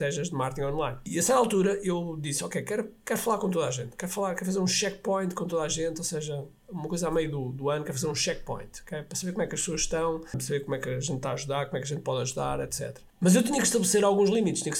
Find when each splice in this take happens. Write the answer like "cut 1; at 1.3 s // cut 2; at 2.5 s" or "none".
none